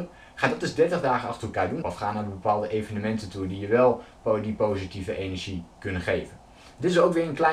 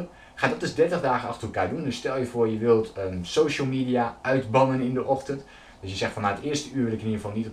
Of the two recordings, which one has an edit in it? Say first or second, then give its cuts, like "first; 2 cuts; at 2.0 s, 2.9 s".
first; 1 cut; at 1.8 s